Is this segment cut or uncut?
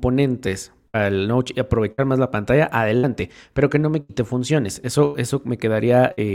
uncut